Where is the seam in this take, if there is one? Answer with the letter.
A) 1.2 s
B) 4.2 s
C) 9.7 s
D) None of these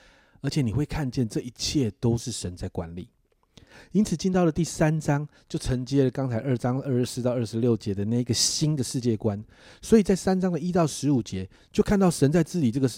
D